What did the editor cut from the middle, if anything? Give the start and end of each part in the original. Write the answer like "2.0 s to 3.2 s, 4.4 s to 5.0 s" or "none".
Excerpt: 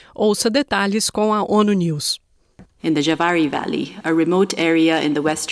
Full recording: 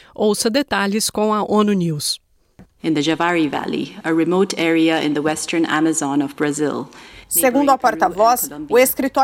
none